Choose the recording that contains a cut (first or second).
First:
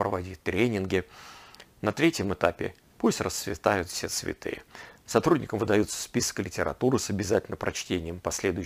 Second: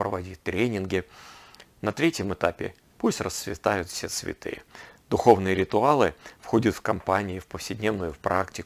first